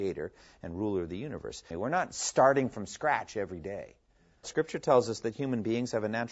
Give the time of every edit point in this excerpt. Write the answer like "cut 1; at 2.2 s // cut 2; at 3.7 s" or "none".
cut 1; at 1.7 s // cut 2; at 4.4 s